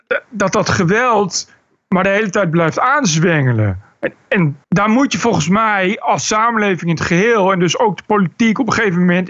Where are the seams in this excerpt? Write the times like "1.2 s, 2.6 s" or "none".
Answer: 4.6 s